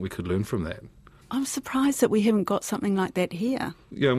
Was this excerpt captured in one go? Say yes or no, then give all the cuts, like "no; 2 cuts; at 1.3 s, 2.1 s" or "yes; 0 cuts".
yes; 0 cuts